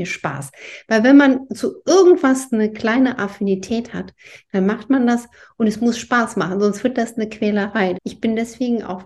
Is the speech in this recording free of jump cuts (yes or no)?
no